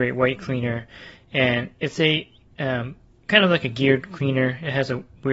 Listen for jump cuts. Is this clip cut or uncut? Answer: uncut